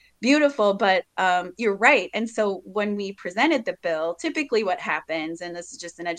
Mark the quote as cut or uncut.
uncut